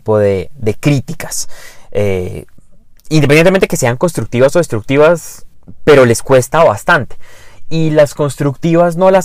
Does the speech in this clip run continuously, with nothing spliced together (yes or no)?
yes